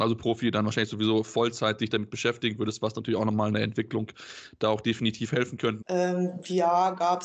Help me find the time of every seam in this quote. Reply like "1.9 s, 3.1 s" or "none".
5.8 s